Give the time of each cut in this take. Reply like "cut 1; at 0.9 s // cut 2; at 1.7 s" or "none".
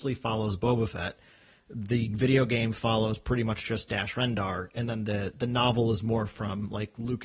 none